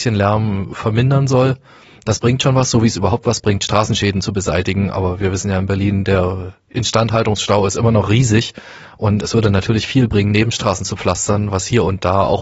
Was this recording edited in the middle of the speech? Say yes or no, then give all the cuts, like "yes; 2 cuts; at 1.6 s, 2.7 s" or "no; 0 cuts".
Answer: no; 0 cuts